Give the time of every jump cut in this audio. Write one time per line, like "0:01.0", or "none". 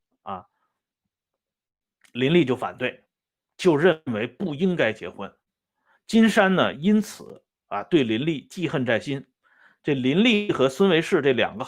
none